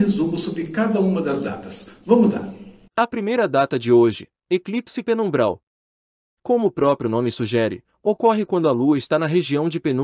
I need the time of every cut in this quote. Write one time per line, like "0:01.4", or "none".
0:04.4

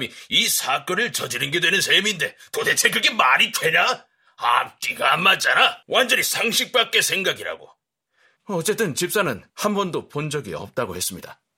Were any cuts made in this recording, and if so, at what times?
0:05.8
0:08.4
0:09.5

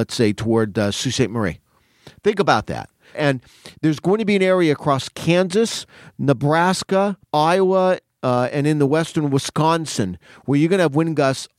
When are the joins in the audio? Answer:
0:03.1
0:07.2

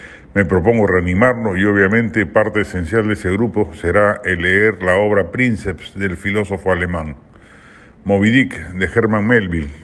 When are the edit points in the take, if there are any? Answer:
none

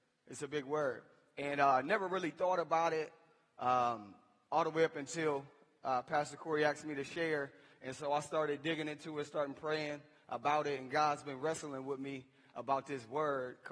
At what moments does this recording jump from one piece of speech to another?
none

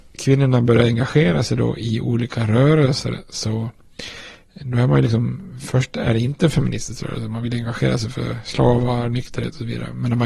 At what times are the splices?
none

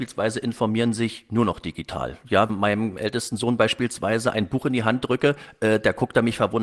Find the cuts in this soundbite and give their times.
0:02.5

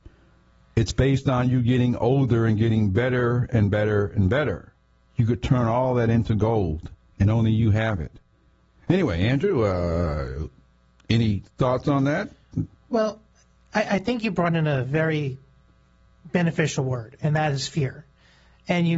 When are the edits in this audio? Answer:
none

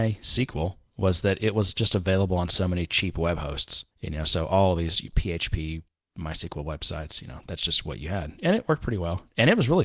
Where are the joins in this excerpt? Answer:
0:03.9

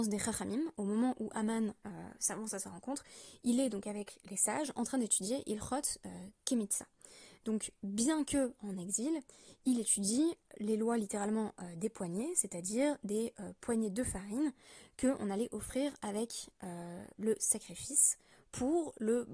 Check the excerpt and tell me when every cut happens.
none

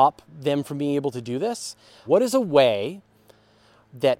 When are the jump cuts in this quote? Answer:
0:02.1

